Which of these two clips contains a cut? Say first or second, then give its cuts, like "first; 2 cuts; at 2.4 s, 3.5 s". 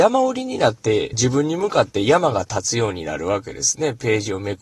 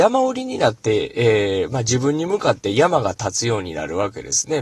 first; 1 cut; at 1.1 s